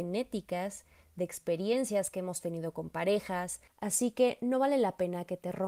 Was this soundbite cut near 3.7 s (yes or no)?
yes